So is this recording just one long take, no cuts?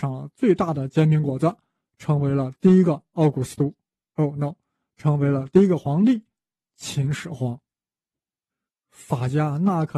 no; 1 cut; at 8.7 s

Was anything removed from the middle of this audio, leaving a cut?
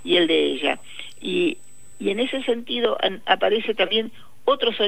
no; 0 cuts

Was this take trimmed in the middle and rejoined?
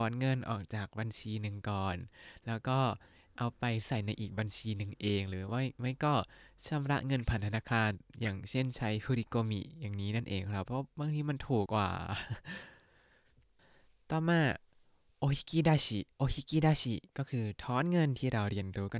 yes; 2 cuts; at 11.7 s, 16.1 s

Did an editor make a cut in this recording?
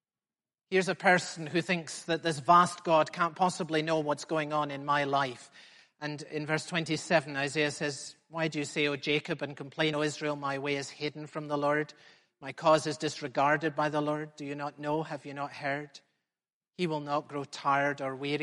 no; 0 cuts

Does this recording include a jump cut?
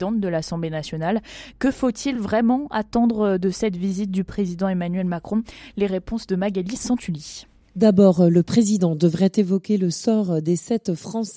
no; 0 cuts

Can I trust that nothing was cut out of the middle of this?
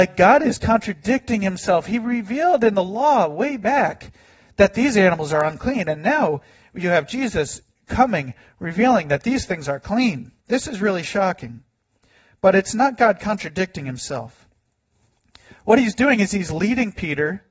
no; 1 cut; at 10.4 s

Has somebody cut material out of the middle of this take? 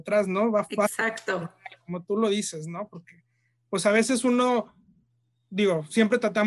no; 0 cuts

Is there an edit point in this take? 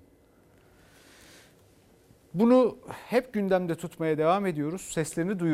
no; 0 cuts

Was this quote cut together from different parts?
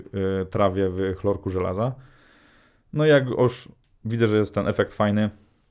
no; 0 cuts

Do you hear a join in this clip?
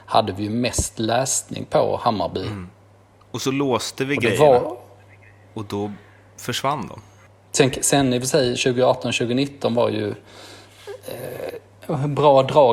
no; 0 cuts

